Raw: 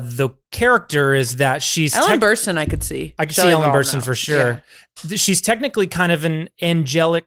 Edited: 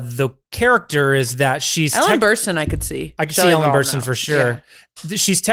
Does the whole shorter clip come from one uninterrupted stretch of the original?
yes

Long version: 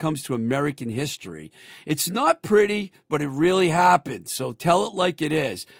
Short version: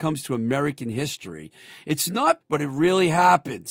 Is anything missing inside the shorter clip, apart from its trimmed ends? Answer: yes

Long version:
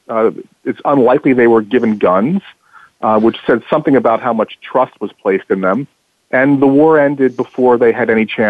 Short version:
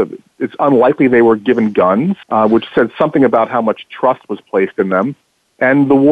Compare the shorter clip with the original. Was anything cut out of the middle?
yes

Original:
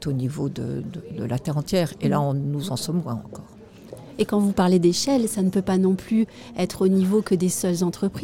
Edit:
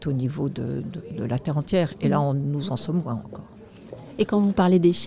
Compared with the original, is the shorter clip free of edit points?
yes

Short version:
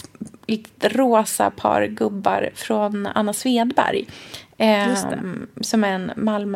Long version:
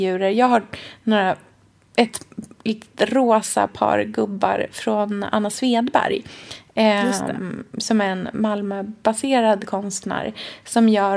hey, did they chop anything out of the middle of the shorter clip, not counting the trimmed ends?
no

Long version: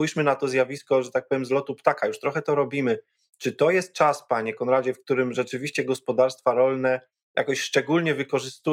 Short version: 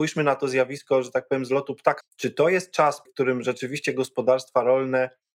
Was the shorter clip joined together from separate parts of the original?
yes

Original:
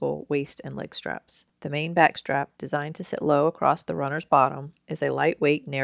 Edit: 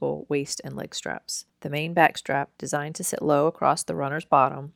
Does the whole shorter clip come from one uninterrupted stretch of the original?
yes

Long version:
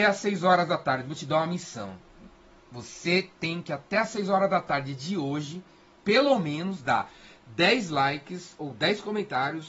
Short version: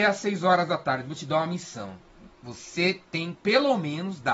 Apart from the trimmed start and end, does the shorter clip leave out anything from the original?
yes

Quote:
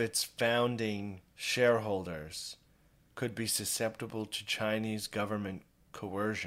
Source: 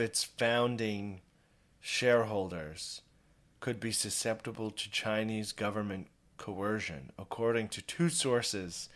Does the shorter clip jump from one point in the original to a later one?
yes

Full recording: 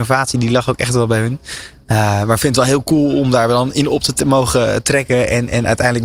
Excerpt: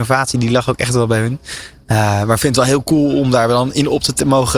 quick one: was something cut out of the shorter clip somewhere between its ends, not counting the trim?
no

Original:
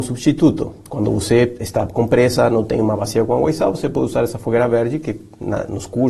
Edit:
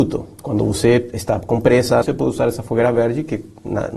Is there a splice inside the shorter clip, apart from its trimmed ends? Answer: yes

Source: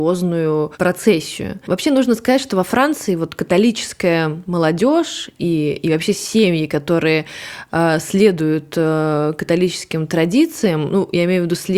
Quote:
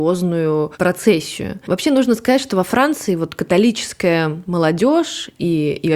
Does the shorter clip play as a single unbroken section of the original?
yes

